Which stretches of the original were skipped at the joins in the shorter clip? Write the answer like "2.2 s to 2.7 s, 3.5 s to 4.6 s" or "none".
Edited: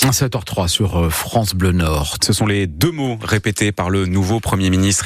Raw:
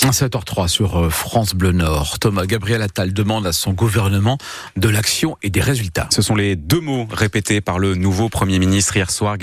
2.2 s to 6.1 s